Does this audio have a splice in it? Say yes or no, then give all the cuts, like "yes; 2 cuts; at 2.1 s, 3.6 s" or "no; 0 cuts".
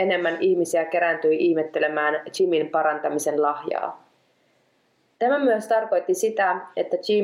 no; 0 cuts